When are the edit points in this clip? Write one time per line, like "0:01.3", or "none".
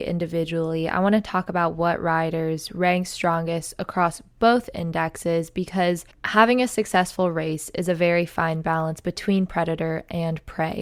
none